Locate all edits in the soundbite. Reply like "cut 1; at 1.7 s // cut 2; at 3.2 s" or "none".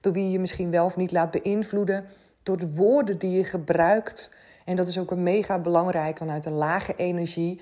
cut 1; at 6.2 s